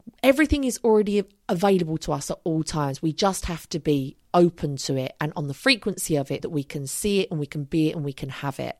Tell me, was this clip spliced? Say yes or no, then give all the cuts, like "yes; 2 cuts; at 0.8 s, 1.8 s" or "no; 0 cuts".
yes; 1 cut; at 6.4 s